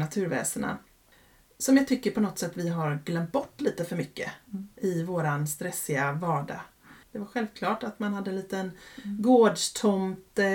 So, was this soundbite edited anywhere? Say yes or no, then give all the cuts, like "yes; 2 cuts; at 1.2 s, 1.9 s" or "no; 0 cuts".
yes; 1 cut; at 7.0 s